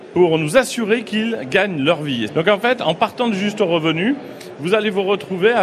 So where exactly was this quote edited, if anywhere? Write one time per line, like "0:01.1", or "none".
0:02.3